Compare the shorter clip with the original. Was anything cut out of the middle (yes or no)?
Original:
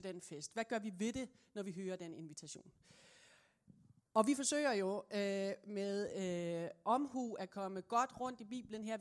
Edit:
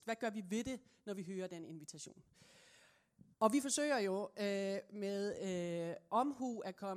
yes